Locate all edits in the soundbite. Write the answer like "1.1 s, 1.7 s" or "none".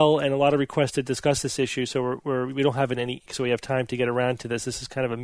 3.3 s